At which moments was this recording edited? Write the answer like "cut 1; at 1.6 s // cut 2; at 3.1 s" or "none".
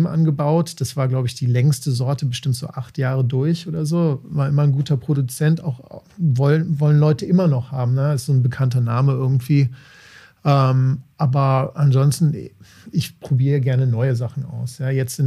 none